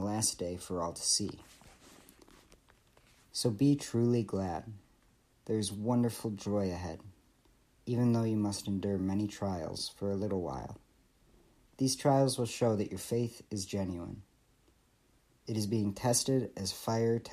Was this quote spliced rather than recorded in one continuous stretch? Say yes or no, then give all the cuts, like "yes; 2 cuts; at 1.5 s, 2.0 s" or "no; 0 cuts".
no; 0 cuts